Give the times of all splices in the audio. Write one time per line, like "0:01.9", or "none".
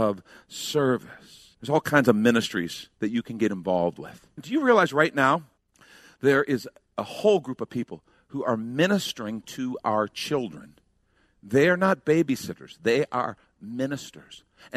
0:04.4